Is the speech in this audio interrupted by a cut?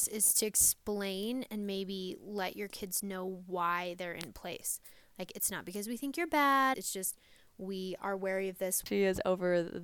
yes; 2 cuts; at 6.7 s, 8.9 s

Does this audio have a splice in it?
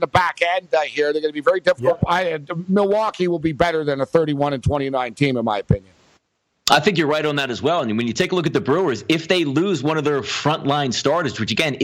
yes; 1 cut; at 2.0 s

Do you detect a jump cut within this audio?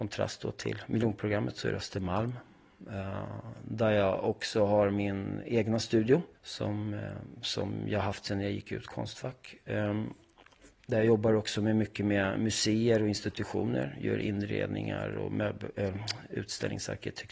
yes; 1 cut; at 6.3 s

